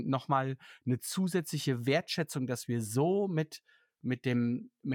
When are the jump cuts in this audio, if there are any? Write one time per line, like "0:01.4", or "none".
none

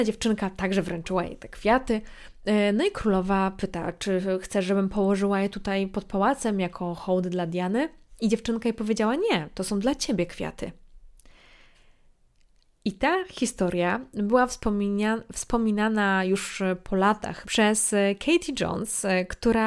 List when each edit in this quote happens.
0:17.4

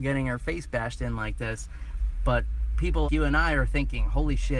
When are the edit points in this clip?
0:03.0

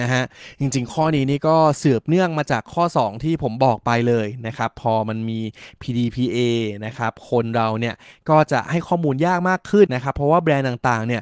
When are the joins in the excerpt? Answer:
0:09.9

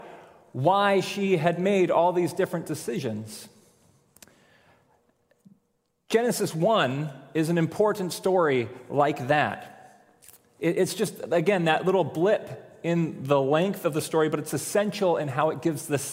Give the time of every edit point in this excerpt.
none

